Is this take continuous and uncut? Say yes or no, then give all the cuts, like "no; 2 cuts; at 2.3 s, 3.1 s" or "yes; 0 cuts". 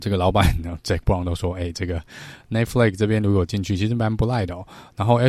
yes; 0 cuts